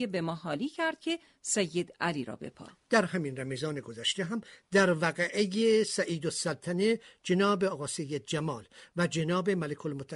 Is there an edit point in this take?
no; 0 cuts

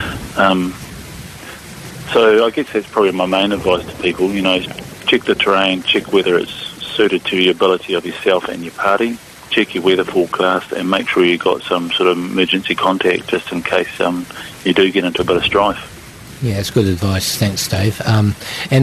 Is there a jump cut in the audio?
no; 0 cuts

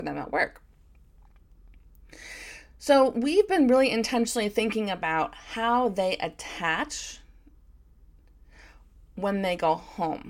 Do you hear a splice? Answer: no; 0 cuts

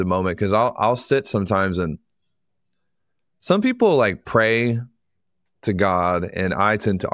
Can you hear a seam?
no; 0 cuts

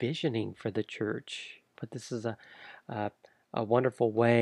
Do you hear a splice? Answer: yes; 1 cut; at 1.8 s

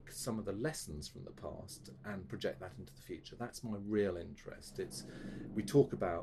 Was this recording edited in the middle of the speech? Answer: no; 0 cuts

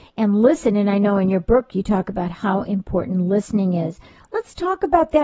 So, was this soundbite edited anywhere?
no; 0 cuts

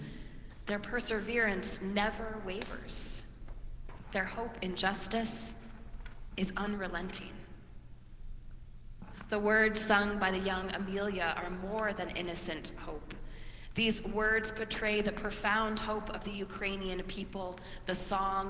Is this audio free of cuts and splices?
yes; 0 cuts

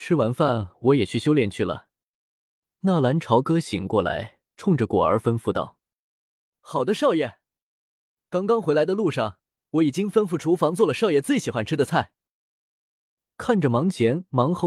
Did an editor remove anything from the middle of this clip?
no; 0 cuts

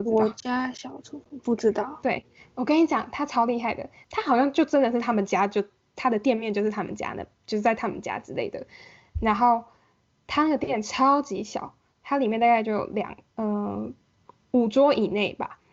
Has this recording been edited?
no; 0 cuts

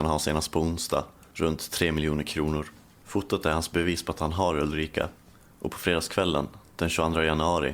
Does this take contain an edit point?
no; 0 cuts

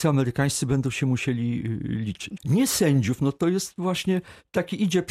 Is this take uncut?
no; 1 cut; at 2.4 s

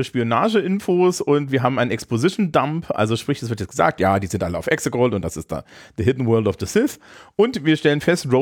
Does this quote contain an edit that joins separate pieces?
no; 0 cuts

